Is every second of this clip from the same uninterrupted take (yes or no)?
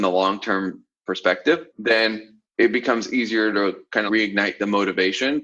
no